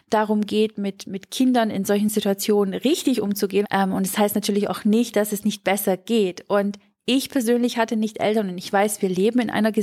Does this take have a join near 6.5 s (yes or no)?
no